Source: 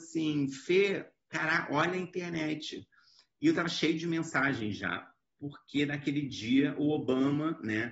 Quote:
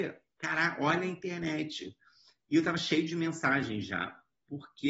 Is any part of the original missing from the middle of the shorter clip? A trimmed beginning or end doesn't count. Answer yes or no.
no